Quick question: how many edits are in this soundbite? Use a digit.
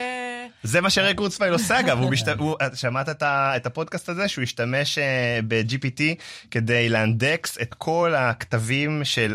0